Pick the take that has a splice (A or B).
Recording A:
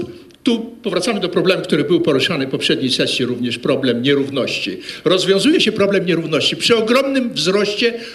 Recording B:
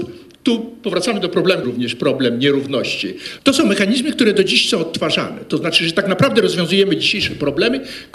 B